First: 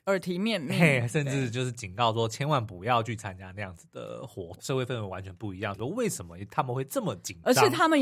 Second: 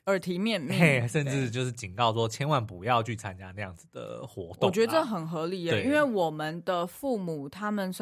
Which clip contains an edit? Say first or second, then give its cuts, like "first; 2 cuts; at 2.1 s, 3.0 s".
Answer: first; 2 cuts; at 4.6 s, 5.7 s